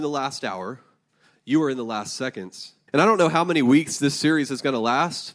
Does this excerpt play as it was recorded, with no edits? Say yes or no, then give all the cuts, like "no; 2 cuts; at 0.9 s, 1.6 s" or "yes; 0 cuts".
no; 1 cut; at 2.9 s